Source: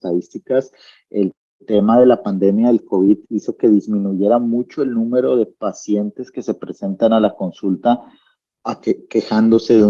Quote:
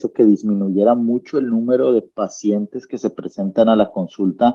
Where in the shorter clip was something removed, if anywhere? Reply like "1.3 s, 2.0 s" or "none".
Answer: none